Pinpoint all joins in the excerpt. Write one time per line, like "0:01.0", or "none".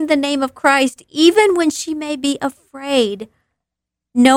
none